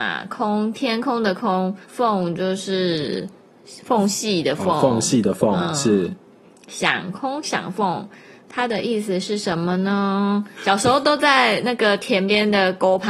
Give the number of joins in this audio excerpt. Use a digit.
2